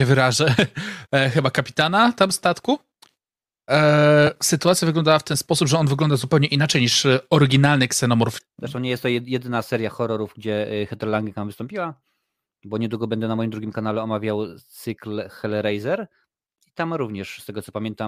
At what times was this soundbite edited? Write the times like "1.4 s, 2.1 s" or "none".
8.4 s